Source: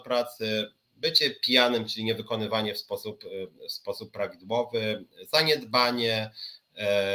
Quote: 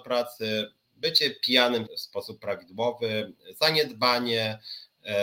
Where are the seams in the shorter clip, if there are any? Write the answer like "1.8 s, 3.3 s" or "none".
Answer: 1.9 s